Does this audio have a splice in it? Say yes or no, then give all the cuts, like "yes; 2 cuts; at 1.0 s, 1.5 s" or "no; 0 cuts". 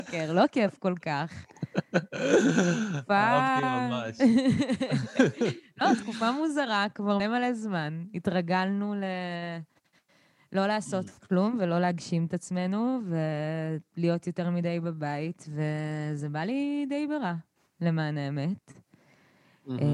yes; 1 cut; at 7.2 s